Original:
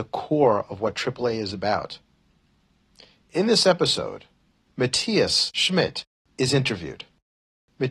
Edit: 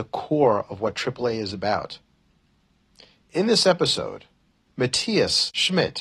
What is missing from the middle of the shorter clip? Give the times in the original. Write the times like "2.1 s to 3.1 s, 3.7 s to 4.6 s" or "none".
none